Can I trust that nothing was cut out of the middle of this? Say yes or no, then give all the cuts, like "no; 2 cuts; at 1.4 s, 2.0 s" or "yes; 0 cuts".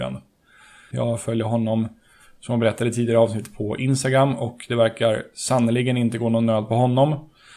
no; 1 cut; at 0.9 s